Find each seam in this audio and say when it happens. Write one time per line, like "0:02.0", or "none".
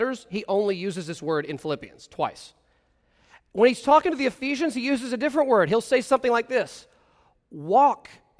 none